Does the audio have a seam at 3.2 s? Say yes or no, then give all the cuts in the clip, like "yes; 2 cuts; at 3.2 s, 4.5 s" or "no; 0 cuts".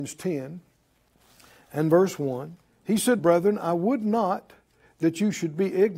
yes; 1 cut; at 3.2 s